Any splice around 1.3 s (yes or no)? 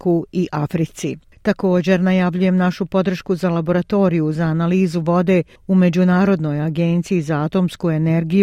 no